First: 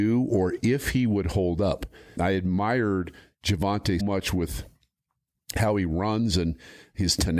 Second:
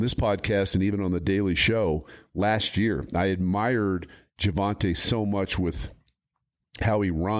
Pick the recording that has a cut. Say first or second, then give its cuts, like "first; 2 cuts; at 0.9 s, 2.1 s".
first; 2 cuts; at 2.2 s, 4.0 s